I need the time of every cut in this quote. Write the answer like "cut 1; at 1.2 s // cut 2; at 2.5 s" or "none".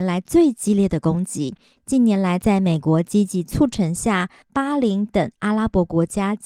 cut 1; at 1.8 s // cut 2; at 4.4 s